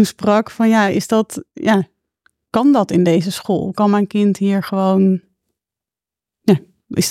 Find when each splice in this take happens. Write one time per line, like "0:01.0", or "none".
none

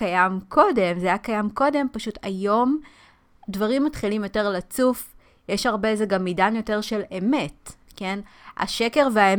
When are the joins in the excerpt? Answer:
none

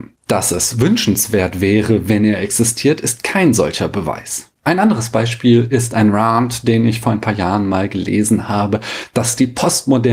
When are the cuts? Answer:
none

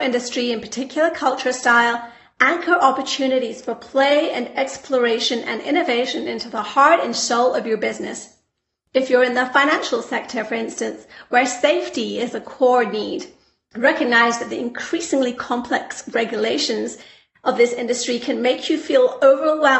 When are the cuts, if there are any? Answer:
none

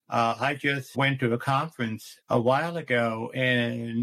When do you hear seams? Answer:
0:00.9
0:02.2

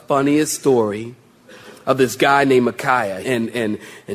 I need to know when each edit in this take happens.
0:03.2

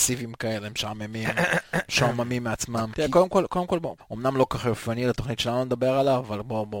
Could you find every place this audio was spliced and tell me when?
0:02.9
0:04.0

